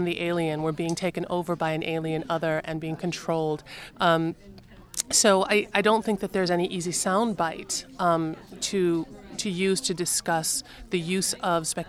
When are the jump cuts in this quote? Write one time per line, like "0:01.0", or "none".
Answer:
0:03.9